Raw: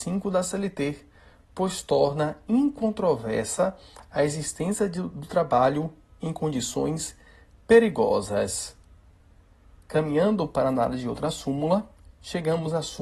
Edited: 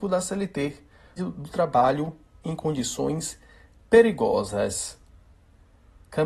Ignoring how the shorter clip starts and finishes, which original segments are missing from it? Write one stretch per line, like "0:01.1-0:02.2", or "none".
0:01.4-0:04.9